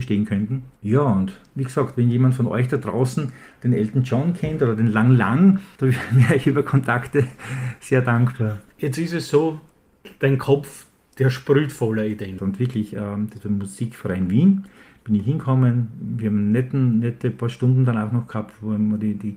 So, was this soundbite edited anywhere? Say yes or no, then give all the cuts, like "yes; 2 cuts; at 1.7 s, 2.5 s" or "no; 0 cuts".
yes; 1 cut; at 12.4 s